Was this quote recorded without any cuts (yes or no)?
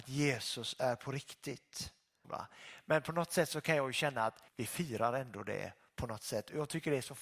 no